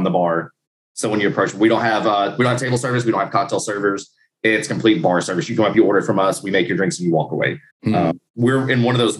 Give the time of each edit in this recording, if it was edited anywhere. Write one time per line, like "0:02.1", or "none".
none